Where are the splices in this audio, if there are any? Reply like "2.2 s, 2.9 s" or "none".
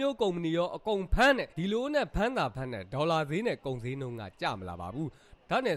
1.5 s

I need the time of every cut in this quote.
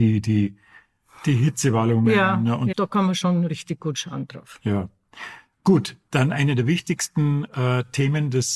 2.7 s

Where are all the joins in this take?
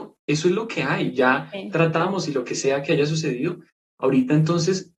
none

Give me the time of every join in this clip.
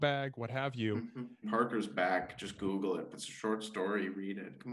1.4 s, 3.1 s

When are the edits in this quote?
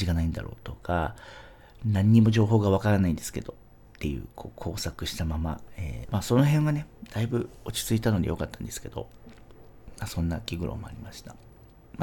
6.0 s

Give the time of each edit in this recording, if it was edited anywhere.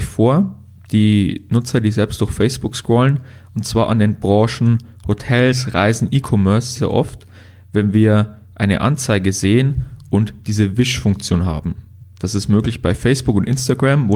6.8 s

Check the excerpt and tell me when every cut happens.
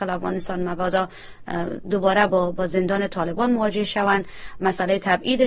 none

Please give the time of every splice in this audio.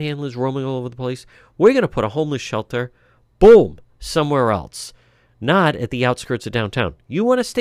none

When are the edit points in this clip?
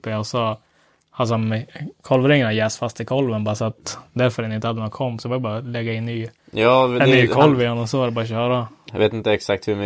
6.4 s, 8.9 s

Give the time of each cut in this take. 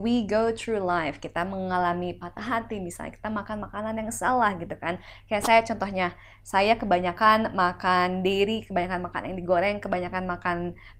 none

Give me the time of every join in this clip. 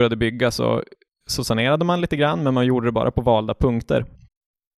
none

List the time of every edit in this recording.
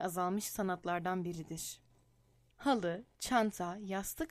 2.5 s

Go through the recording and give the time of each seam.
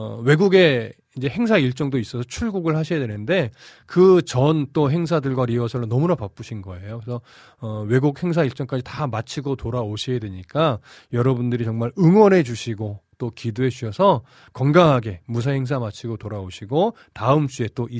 none

